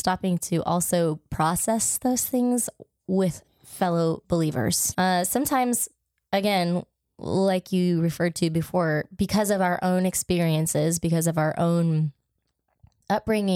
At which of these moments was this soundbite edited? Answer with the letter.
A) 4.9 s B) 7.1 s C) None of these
A